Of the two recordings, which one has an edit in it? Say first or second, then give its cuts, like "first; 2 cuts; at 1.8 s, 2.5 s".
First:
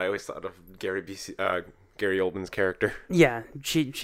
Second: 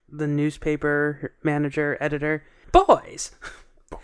second; 1 cut; at 2.6 s